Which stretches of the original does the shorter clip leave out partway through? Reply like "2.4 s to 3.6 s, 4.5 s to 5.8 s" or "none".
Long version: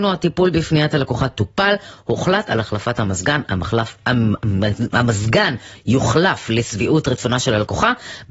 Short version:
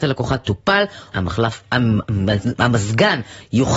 2.0 s to 3.5 s